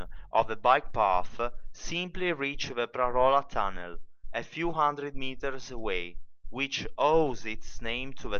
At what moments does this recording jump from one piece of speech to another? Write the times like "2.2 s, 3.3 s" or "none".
none